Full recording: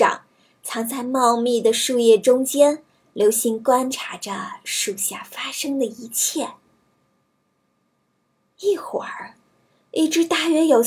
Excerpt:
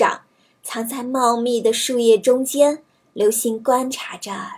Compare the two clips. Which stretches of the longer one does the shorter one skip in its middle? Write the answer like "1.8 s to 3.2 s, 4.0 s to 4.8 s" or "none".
none